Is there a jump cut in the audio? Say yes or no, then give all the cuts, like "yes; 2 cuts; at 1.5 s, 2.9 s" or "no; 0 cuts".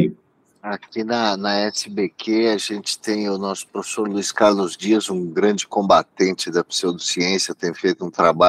no; 0 cuts